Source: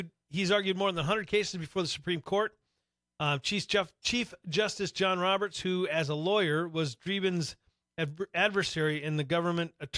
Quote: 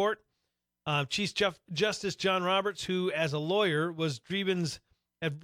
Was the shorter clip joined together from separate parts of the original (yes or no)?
yes